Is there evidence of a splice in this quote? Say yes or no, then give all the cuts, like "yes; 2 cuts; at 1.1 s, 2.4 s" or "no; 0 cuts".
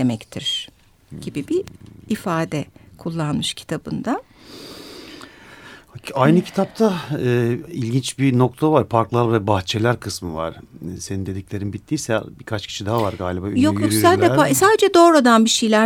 no; 0 cuts